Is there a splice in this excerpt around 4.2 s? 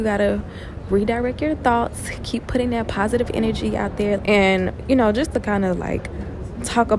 yes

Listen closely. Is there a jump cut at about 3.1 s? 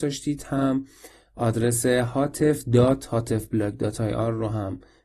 no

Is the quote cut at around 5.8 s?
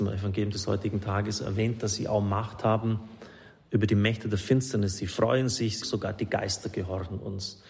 yes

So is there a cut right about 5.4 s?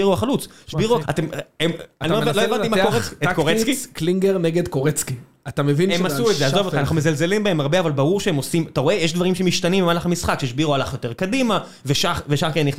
no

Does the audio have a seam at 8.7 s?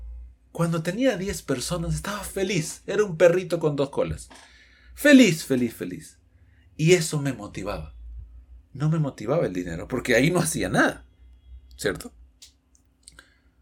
no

